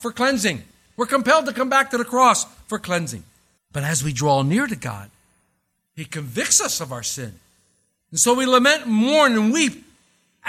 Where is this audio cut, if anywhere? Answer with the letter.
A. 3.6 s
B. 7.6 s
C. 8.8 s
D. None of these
A